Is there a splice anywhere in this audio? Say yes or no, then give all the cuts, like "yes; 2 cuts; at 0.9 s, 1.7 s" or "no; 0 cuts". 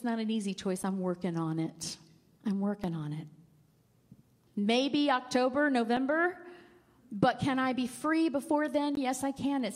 yes; 1 cut; at 4.5 s